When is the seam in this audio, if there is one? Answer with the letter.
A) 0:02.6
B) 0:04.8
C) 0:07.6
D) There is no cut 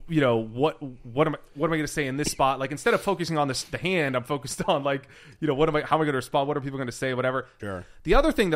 C